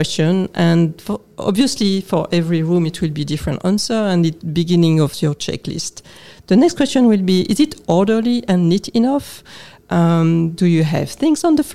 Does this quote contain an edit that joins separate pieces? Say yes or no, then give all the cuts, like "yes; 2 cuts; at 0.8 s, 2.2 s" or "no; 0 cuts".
no; 0 cuts